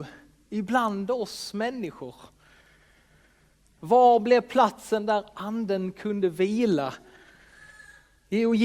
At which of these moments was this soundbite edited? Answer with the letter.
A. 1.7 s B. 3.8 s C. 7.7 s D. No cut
B